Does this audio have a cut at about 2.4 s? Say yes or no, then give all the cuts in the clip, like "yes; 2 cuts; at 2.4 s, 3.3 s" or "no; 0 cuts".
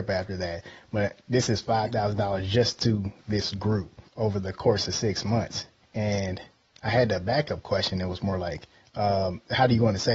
no; 2 cuts; at 4.1 s, 8.8 s